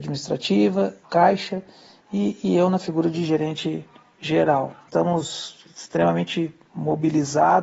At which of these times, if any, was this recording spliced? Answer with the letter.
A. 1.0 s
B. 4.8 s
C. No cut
A